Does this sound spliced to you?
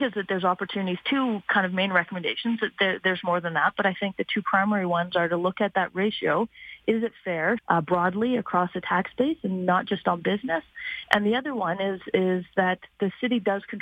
yes; 1 cut; at 7.6 s

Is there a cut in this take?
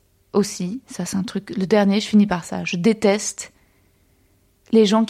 no; 0 cuts

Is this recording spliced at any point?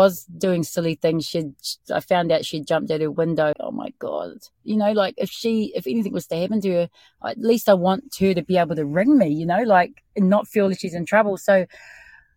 yes; 1 cut; at 3.5 s

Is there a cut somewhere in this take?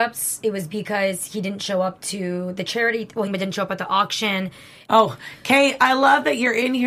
yes; 2 cuts; at 3.3 s, 4.9 s

